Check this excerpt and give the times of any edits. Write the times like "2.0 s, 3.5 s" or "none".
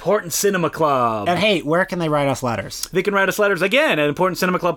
none